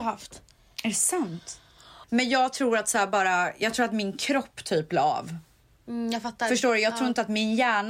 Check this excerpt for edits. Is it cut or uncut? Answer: cut